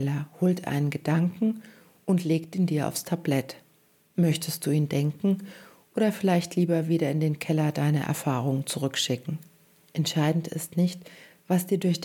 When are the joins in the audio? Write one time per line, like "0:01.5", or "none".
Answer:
none